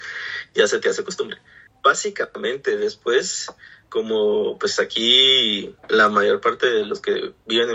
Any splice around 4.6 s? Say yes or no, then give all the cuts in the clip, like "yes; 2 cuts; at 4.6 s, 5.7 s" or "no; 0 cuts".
no; 2 cuts; at 1.7 s, 5.8 s